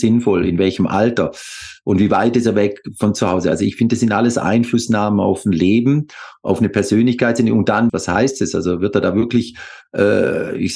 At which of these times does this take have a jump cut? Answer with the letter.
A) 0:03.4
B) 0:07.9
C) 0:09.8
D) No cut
B